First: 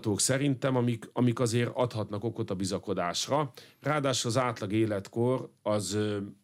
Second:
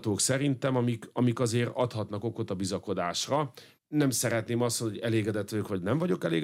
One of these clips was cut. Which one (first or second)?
second